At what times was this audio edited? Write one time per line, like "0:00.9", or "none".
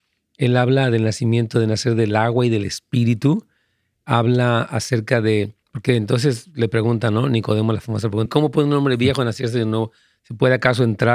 0:08.3